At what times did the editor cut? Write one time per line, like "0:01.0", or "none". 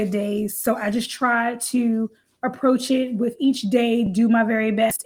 none